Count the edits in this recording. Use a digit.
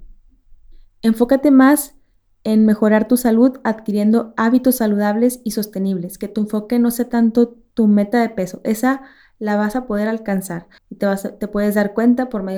1